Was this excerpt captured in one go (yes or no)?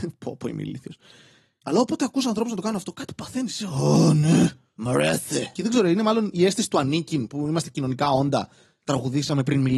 no